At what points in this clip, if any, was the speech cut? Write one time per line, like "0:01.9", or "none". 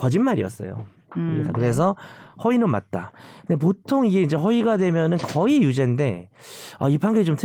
0:01.4